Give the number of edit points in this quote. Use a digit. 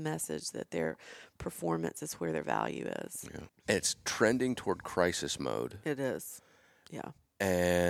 1